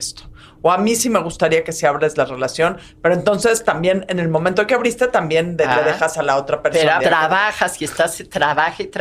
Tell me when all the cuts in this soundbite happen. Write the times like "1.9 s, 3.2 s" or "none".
7.0 s